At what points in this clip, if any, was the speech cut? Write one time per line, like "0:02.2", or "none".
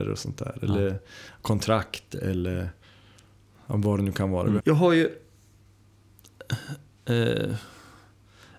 0:04.6

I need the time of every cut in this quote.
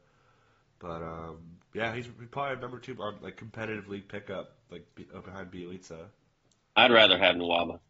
0:01.6

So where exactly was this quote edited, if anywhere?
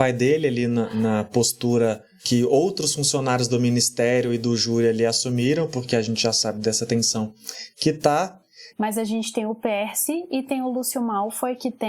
0:08.7

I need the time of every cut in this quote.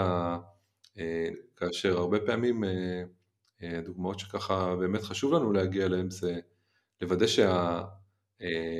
0:01.3

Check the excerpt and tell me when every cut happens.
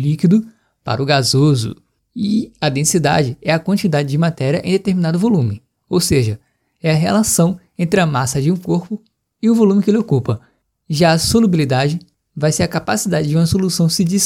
none

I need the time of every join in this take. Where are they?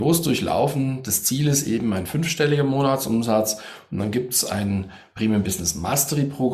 none

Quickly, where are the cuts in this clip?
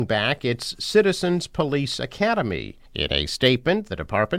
0:02.9

